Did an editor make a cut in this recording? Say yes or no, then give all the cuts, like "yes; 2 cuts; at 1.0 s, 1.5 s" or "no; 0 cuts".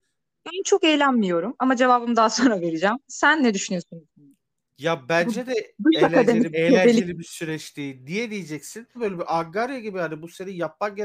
yes; 2 cuts; at 6.5 s, 8.9 s